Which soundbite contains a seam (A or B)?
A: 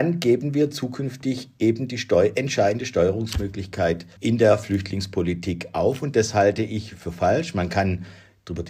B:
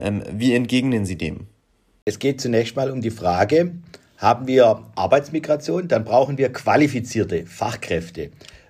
A